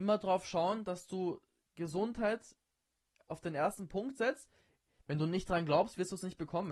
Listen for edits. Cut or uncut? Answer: cut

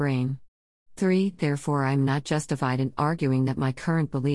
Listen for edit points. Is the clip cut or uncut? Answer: uncut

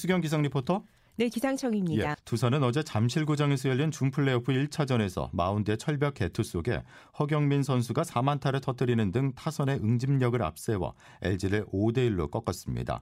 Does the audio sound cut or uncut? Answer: cut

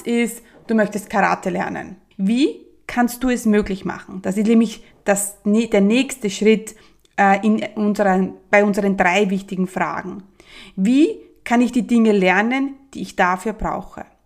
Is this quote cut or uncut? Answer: cut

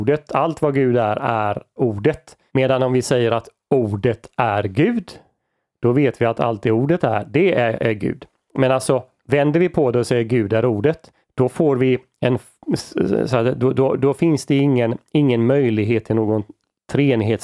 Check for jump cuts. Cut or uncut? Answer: cut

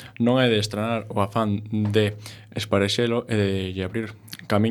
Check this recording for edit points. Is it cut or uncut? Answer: uncut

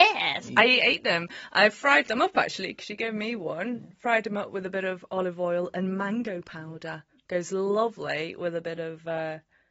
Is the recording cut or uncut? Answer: uncut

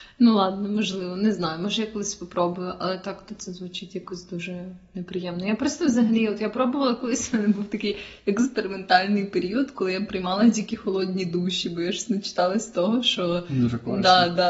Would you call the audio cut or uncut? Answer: uncut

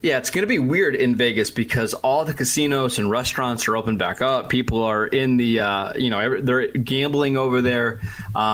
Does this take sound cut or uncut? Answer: uncut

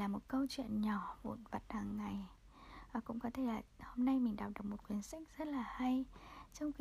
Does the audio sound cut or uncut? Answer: uncut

